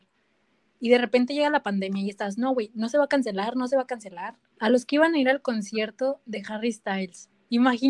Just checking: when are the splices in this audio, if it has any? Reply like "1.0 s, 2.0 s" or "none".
4.6 s